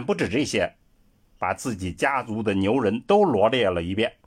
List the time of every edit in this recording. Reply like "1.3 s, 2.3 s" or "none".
1.4 s